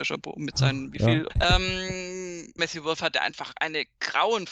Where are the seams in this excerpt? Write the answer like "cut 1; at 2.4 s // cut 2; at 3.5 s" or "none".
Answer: cut 1; at 1.3 s // cut 2; at 2.6 s